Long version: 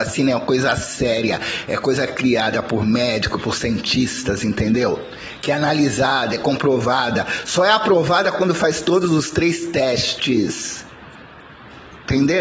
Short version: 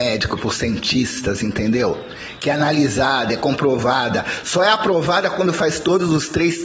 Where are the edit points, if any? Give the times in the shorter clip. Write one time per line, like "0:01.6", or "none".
none